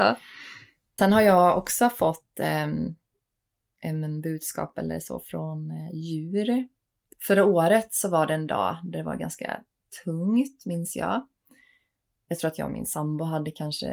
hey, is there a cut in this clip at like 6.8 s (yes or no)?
no